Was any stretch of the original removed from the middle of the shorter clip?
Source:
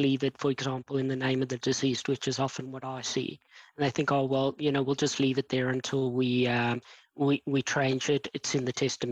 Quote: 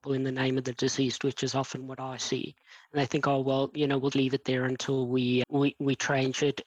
yes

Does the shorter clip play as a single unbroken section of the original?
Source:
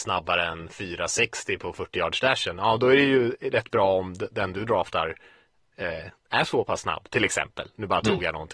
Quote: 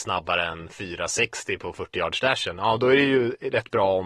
yes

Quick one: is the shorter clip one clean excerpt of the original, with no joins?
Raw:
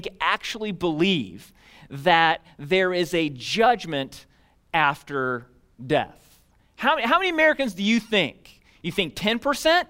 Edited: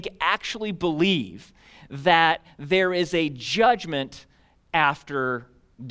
yes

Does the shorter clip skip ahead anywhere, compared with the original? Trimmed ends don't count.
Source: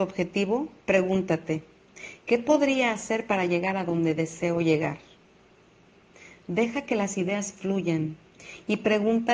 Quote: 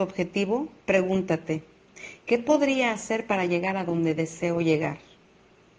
no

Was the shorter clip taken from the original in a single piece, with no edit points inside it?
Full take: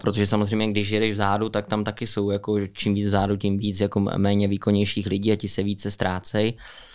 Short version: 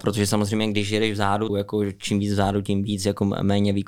no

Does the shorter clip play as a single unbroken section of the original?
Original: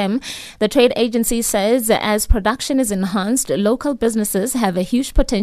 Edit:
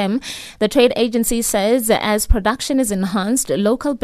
yes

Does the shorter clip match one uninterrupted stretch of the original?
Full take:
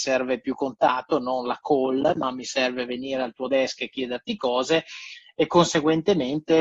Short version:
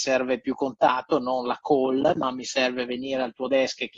yes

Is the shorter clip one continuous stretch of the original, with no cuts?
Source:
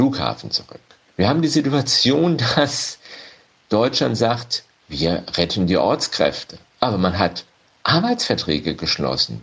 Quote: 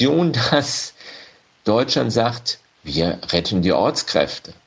yes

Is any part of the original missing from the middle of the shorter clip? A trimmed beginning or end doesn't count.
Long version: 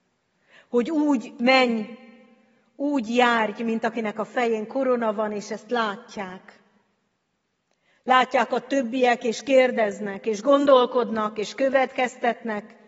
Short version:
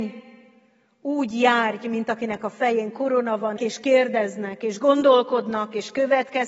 yes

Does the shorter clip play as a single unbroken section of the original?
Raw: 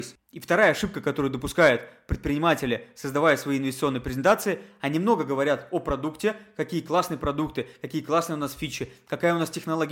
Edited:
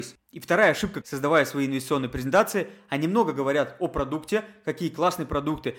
no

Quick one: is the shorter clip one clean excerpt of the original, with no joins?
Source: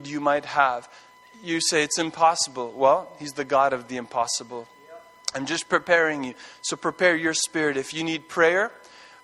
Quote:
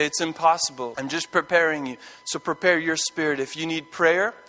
no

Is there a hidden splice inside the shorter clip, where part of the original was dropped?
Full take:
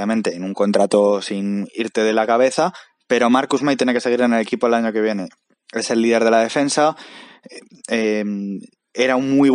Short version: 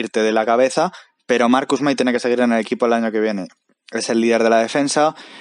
no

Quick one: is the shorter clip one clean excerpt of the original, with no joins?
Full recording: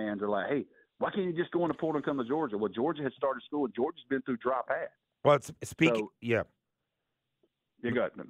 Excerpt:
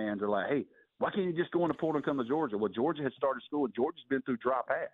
yes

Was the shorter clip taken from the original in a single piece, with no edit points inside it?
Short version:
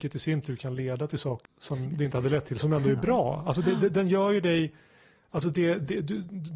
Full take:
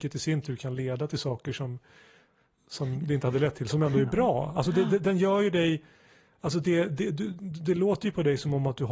no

